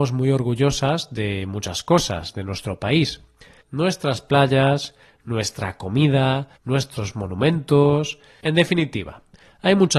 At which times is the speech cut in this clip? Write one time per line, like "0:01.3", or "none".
0:03.6
0:06.6
0:08.4